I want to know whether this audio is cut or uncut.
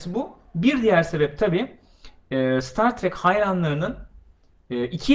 uncut